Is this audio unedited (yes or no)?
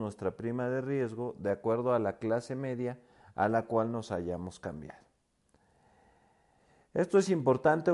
yes